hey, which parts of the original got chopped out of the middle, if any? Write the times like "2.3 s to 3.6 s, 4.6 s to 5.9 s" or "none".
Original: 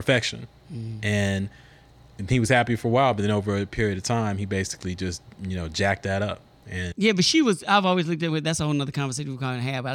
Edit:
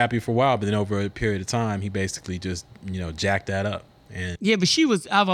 none